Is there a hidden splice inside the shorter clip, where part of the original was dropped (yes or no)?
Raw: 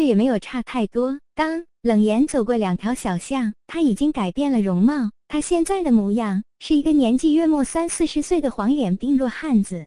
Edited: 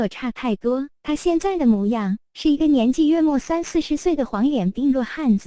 yes